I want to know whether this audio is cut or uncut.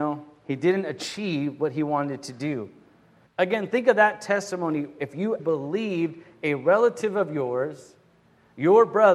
cut